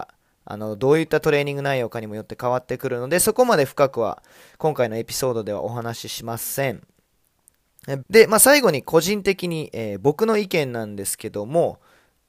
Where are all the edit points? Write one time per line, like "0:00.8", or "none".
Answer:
0:08.0